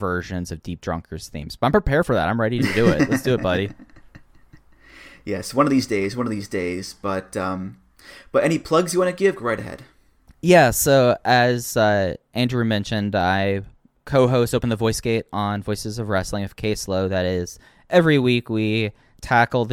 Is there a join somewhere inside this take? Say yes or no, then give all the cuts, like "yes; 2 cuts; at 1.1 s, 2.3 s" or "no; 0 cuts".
no; 0 cuts